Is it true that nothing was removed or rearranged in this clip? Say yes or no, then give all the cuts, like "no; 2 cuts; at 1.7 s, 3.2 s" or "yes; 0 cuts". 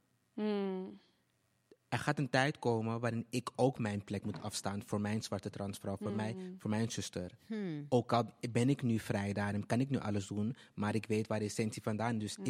yes; 0 cuts